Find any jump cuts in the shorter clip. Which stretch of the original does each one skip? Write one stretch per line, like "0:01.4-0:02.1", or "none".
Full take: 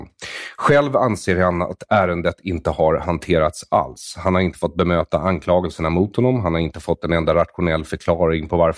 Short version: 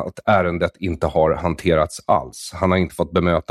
none